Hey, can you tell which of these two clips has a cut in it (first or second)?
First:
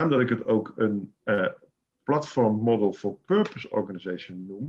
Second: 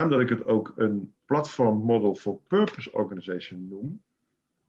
second